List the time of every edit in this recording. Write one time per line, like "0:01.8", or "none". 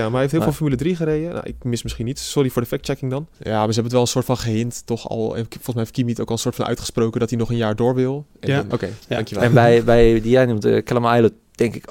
0:03.3
0:08.7